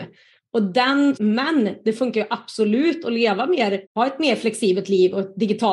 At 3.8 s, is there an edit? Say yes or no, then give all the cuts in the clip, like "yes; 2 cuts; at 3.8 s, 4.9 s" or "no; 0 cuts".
yes; 2 cuts; at 1.2 s, 3.8 s